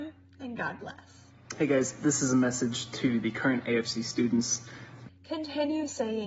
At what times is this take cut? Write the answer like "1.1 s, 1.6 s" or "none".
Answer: 5.1 s